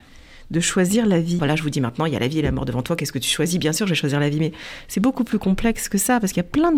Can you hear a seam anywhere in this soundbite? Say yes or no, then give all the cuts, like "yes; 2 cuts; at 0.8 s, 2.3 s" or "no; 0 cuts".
yes; 1 cut; at 1.4 s